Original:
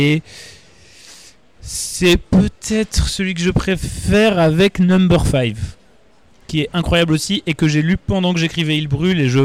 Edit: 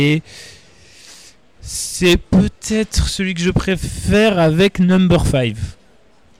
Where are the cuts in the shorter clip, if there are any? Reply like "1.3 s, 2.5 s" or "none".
none